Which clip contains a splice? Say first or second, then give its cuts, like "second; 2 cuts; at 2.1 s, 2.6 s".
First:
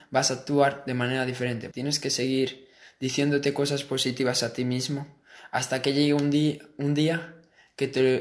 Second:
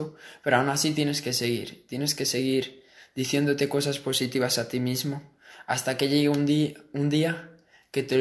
first; 1 cut; at 1.7 s